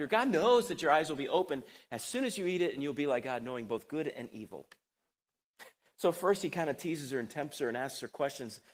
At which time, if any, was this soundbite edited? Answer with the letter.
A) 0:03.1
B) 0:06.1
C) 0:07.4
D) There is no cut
D